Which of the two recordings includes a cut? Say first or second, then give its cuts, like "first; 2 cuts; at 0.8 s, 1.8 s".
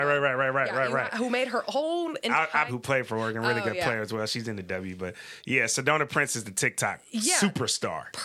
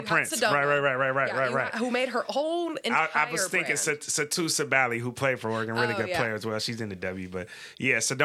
first; 1 cut; at 2.7 s